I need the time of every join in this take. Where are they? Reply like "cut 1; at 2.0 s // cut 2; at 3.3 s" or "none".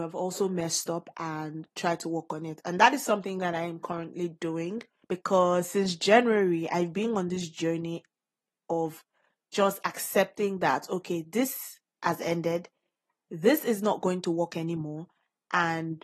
none